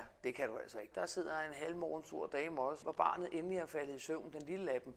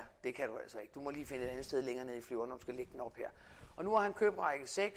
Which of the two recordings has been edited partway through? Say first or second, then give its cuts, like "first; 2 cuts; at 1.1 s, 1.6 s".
first; 2 cuts; at 0.9 s, 2.8 s